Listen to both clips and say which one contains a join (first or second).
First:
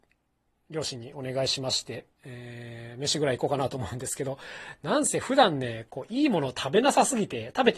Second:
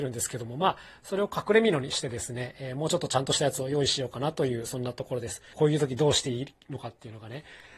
second